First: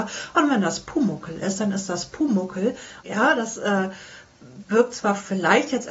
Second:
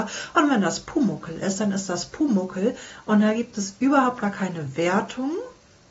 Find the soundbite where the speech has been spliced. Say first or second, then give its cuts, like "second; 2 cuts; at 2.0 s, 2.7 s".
first; 1 cut; at 3.0 s